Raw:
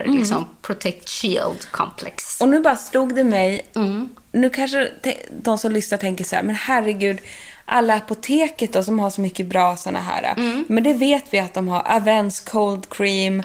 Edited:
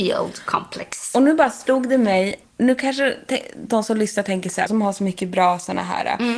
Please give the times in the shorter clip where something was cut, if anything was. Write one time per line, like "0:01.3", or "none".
0:02.4
0:04.7